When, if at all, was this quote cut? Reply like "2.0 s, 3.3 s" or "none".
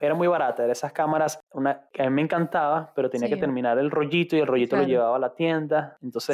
1.5 s

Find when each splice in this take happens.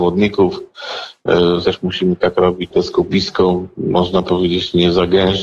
1.6 s, 2.7 s

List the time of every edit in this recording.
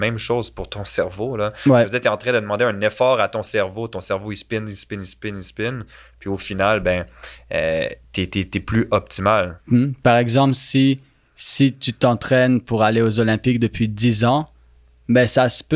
9.6 s

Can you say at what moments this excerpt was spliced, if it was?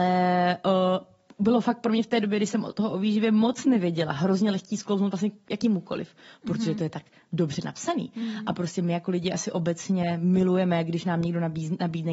none

